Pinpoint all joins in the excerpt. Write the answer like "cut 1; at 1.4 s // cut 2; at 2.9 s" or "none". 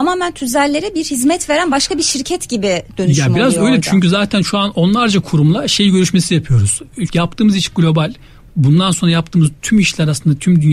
cut 1; at 7.1 s